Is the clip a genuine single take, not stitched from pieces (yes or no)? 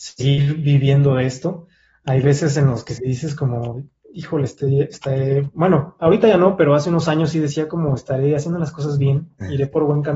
yes